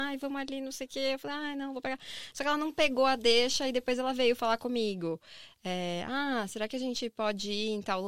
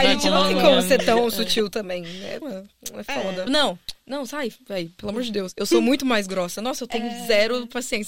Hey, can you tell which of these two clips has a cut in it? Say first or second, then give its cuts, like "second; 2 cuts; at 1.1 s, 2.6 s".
second; 2 cuts; at 2.4 s, 3.5 s